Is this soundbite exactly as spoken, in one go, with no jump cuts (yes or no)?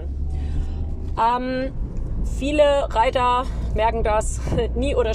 no